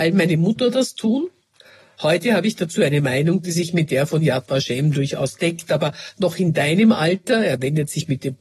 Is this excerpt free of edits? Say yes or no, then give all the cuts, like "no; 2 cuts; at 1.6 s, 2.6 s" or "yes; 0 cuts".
yes; 0 cuts